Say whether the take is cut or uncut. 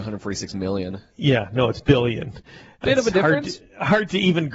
uncut